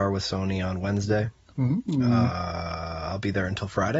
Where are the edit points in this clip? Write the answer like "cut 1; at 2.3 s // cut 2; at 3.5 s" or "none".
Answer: none